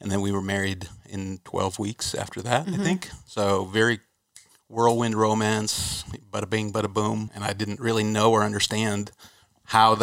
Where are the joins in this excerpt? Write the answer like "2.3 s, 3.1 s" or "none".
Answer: 7.3 s